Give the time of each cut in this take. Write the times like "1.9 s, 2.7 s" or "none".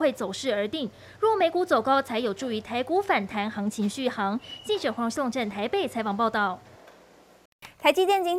none